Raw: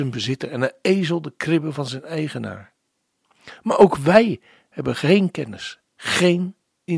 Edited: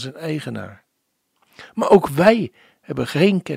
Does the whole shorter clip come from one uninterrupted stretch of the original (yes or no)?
yes